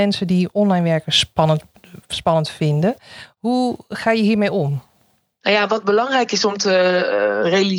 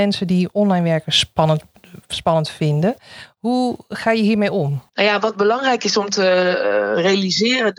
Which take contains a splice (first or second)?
second